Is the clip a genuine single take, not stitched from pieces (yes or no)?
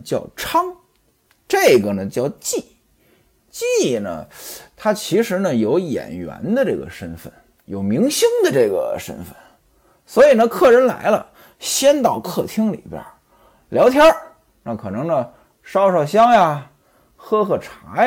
yes